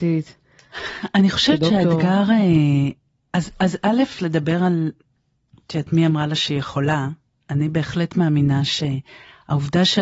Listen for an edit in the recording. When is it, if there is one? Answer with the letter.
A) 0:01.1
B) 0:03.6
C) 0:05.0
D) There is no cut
D